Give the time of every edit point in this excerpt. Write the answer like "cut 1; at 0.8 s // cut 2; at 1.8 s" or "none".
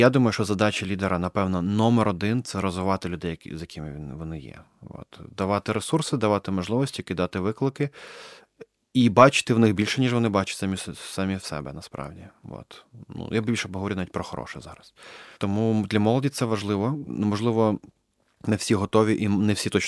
none